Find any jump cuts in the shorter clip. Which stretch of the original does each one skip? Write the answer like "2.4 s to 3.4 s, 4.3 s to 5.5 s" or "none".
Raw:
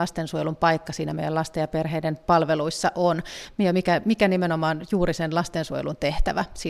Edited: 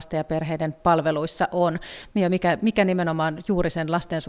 none